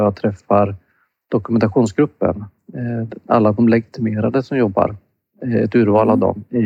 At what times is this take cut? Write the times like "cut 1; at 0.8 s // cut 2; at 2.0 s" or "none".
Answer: none